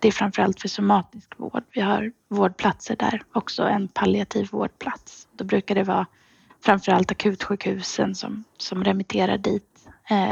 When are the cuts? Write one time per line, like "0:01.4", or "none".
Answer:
none